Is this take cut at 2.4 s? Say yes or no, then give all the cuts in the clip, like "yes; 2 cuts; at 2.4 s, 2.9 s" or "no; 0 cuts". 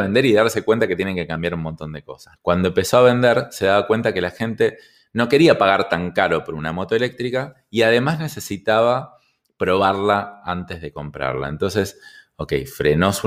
yes; 1 cut; at 2.4 s